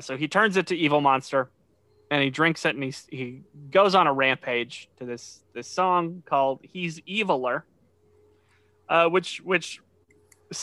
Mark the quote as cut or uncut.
uncut